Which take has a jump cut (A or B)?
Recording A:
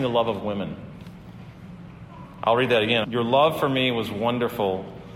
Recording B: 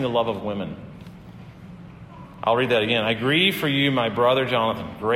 A